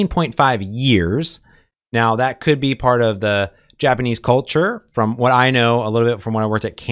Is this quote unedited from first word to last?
yes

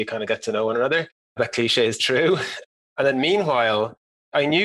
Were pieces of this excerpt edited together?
yes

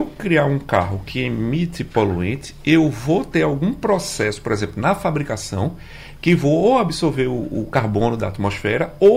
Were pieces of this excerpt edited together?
no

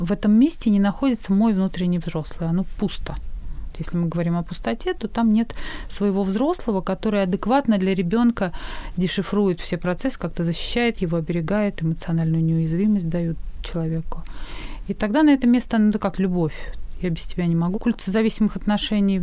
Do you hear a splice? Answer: yes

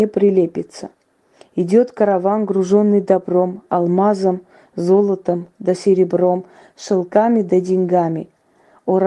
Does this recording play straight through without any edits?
yes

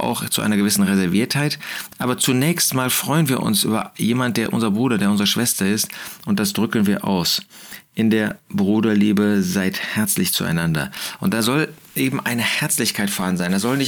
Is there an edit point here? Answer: no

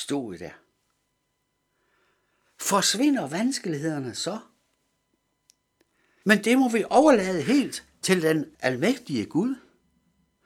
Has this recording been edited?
yes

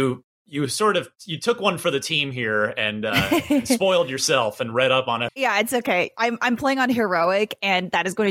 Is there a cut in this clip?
yes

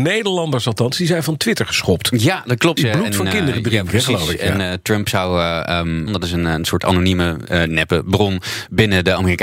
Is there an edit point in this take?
yes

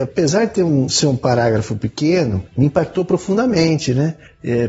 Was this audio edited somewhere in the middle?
no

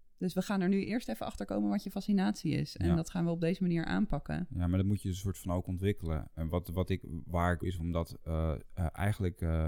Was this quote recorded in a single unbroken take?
no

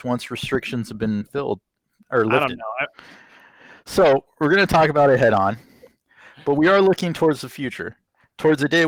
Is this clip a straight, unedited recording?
no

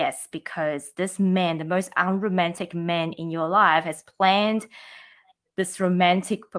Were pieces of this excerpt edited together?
no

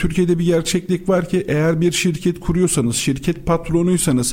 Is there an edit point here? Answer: no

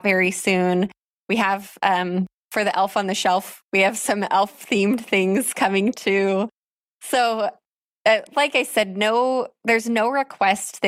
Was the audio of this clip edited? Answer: no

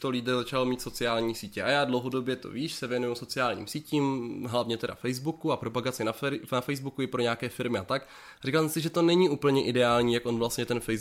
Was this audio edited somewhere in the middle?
no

